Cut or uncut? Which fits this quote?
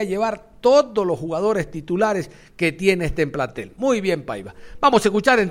uncut